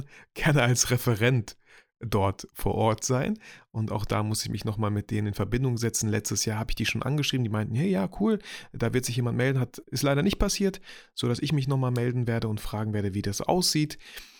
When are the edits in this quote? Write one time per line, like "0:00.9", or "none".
0:09.8